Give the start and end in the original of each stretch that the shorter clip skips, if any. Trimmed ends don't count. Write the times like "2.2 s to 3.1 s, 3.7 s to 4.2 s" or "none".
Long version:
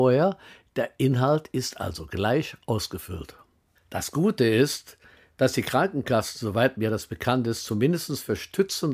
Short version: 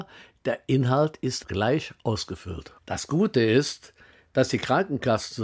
1.7 s to 2.1 s, 3.4 s to 3.8 s